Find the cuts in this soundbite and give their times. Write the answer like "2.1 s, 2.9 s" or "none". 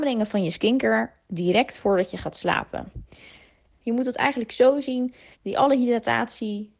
3.7 s, 5.3 s